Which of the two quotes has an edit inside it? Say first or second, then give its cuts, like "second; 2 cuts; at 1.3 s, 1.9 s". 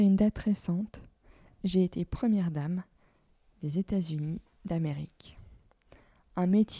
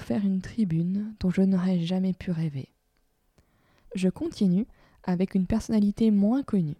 second; 1 cut; at 3.8 s